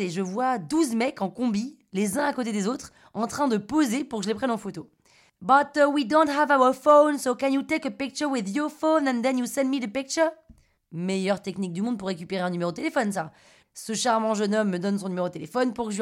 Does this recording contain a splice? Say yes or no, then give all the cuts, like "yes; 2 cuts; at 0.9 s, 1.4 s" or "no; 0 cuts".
yes; 1 cut; at 13.6 s